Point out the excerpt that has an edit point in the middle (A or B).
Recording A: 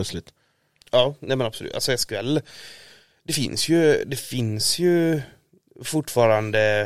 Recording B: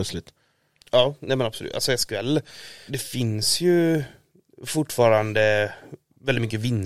B